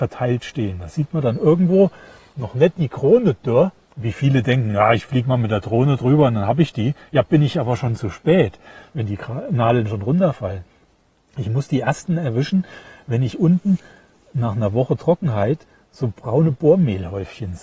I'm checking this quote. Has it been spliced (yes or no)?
no